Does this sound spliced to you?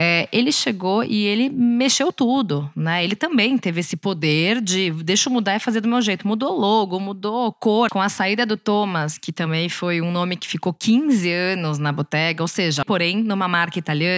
yes; 2 cuts; at 7.9 s, 12.8 s

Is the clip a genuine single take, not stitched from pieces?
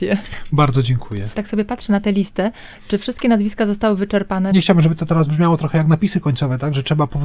yes; 0 cuts

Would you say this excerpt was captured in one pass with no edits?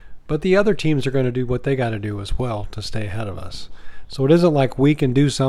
yes; 0 cuts

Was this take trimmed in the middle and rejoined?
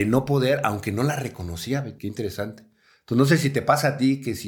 yes; 1 cut; at 2.0 s

